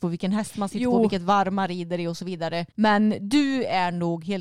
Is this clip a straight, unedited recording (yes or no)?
no